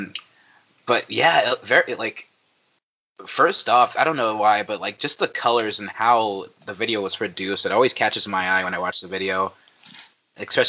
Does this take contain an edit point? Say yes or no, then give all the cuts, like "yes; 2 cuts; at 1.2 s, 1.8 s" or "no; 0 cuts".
no; 0 cuts